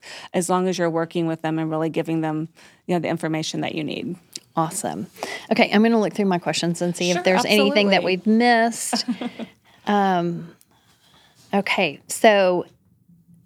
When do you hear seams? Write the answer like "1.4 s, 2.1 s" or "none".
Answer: none